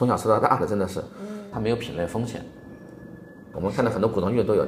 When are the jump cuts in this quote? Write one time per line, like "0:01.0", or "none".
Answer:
0:01.5
0:03.5